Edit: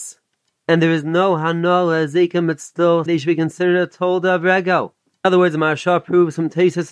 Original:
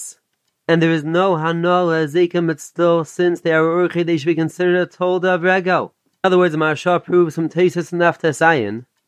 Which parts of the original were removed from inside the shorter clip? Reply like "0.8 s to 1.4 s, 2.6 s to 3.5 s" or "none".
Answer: 3.1 s to 4.1 s